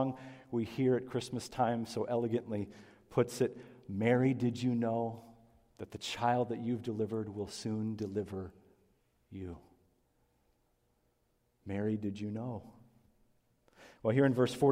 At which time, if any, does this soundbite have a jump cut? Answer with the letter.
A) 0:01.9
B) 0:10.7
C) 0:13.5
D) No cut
D